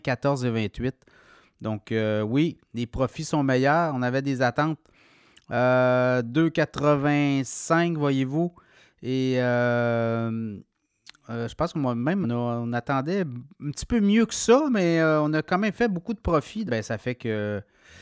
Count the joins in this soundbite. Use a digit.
2